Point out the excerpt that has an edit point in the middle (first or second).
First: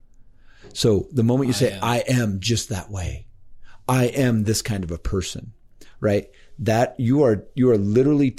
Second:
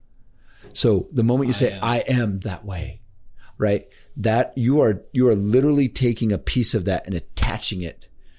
second